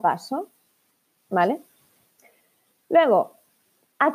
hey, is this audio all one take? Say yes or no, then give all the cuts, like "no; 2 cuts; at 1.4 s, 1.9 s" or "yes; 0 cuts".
no; 1 cut; at 1.2 s